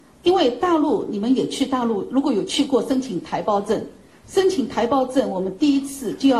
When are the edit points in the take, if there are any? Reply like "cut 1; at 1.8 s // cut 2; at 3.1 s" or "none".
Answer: none